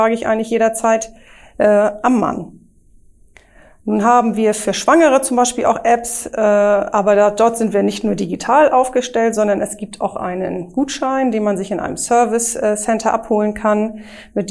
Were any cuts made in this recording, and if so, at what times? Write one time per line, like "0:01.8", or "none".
none